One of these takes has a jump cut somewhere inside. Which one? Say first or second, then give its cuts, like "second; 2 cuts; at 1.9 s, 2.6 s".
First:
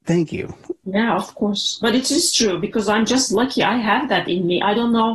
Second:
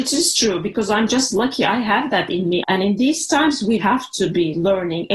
second; 2 cuts; at 2.6 s, 3.8 s